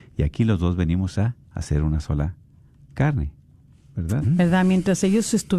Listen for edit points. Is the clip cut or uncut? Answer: cut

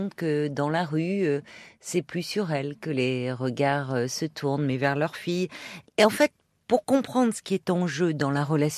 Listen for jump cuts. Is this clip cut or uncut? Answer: cut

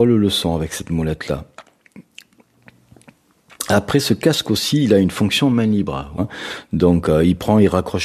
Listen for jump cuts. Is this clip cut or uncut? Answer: cut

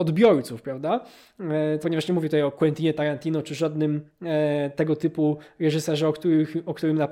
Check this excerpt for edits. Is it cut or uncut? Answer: cut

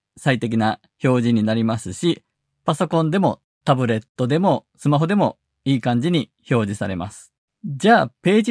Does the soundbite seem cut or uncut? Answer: cut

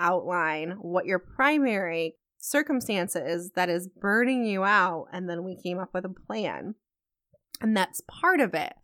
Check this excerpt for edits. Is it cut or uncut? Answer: uncut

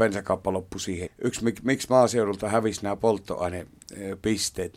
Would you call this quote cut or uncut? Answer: cut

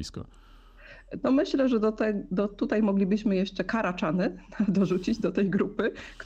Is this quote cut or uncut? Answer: uncut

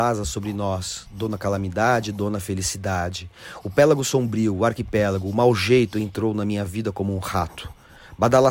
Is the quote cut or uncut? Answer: uncut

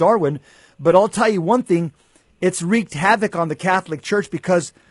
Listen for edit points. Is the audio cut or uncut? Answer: uncut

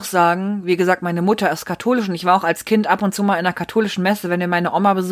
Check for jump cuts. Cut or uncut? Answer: uncut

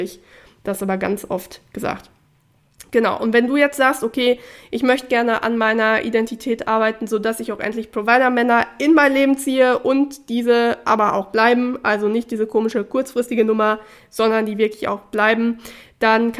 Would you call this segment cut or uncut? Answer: uncut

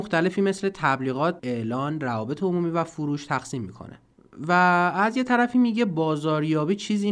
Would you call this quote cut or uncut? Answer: cut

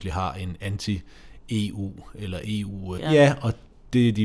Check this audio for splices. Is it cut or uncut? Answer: cut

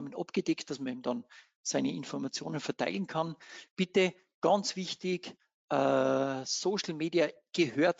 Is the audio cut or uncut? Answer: uncut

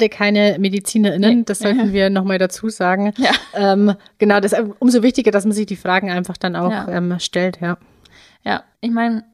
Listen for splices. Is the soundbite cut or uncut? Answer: uncut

